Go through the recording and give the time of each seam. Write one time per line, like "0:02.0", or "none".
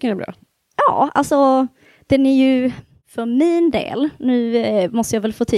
none